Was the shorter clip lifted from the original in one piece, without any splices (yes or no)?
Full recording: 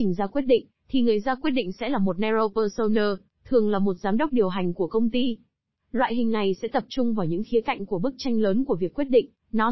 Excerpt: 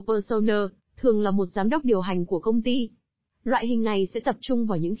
yes